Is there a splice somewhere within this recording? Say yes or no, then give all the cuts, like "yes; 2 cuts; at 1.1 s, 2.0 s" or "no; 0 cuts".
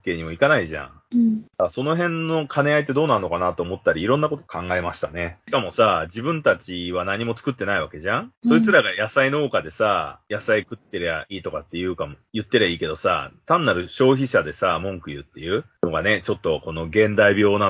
yes; 2 cuts; at 5.4 s, 11.3 s